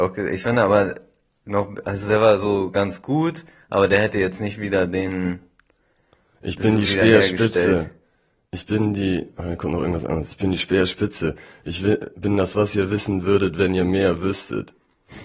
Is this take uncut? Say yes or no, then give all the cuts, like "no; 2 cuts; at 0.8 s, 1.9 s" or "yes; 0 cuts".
yes; 0 cuts